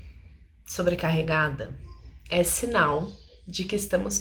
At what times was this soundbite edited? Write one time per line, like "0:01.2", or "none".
none

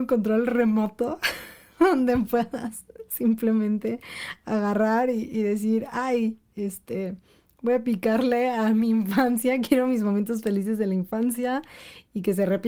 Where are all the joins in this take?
none

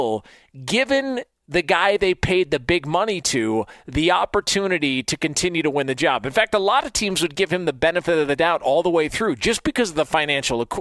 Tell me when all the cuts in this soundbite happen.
none

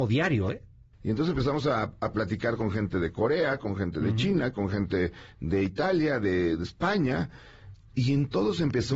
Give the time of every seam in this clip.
0:00.9

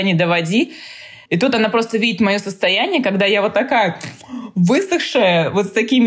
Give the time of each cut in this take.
0:01.3

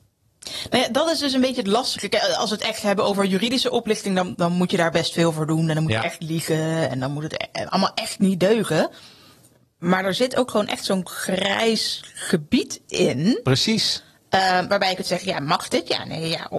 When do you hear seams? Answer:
0:04.3

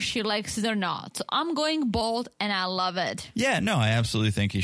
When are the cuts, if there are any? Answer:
none

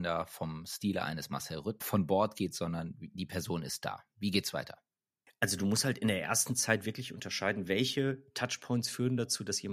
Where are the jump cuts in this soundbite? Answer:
0:01.8

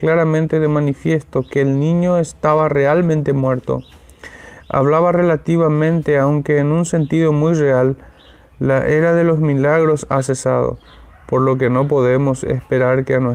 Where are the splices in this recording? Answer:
none

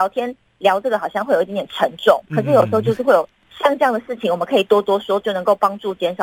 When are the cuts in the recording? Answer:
0:05.2

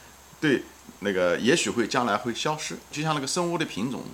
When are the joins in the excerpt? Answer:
0:01.0
0:02.9

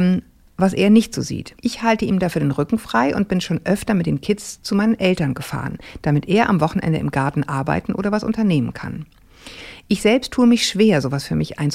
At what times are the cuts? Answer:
0:01.6

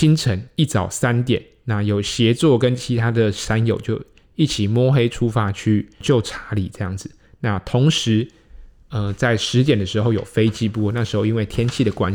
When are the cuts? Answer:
none

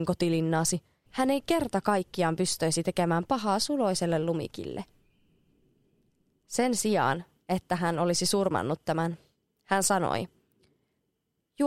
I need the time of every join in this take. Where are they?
0:01.1

